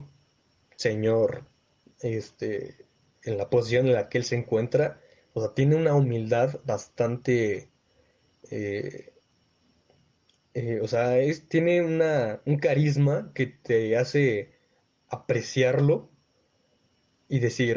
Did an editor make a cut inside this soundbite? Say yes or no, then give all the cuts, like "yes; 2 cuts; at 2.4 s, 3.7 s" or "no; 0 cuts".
no; 0 cuts